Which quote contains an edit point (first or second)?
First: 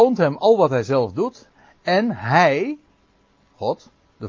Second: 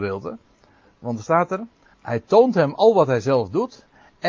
second